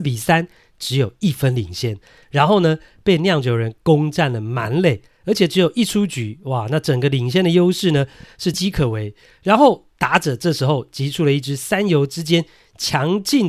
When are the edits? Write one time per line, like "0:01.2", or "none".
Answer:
0:08.5